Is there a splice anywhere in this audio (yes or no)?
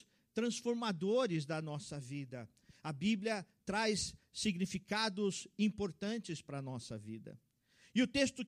no